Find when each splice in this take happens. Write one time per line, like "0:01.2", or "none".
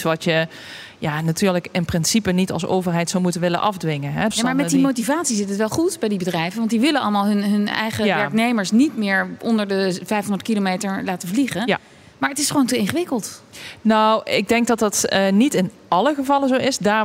0:04.3